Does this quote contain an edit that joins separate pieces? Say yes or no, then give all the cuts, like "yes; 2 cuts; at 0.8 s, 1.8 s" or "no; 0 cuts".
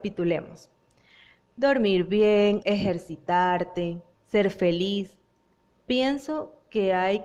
yes; 3 cuts; at 2.6 s, 4.1 s, 5.7 s